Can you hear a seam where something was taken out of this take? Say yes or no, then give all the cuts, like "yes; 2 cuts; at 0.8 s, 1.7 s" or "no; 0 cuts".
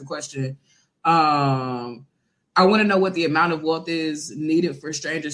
no; 0 cuts